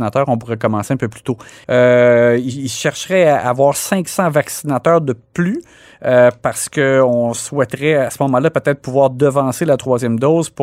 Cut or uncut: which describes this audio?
cut